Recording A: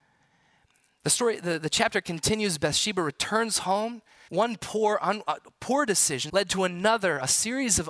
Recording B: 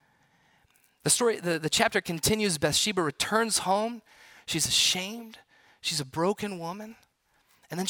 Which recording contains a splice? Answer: A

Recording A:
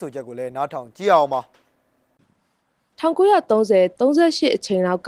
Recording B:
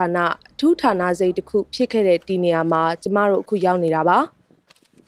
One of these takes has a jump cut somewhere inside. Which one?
A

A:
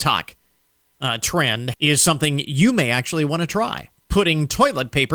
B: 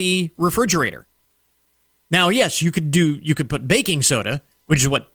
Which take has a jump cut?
A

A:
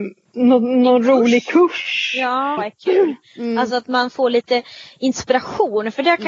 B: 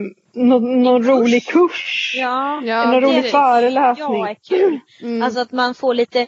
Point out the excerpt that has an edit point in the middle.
A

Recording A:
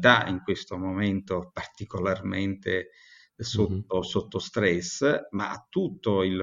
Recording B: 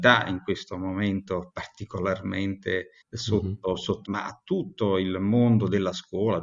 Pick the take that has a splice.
B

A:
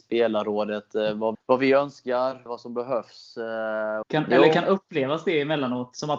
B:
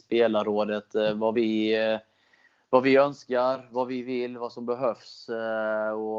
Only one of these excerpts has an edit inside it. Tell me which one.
A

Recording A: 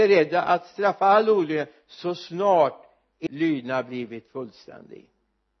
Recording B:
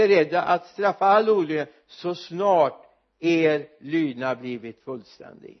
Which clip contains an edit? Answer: A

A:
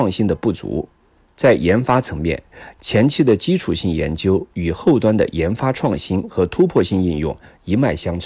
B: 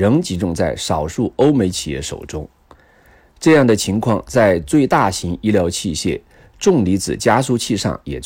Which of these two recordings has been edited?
A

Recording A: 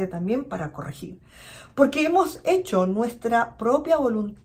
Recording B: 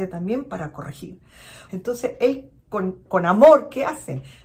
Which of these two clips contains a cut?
B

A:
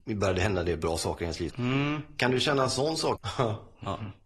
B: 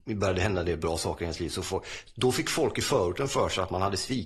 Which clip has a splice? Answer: A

